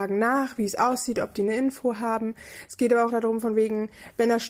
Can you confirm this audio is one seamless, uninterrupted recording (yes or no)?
no